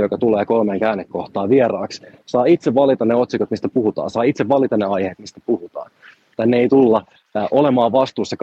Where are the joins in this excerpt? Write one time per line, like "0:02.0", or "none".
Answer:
0:06.3